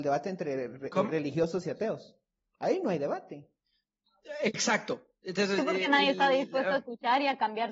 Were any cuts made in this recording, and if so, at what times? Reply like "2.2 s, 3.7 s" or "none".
none